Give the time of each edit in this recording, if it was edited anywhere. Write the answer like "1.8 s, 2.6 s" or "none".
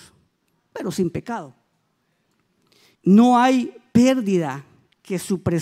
2.9 s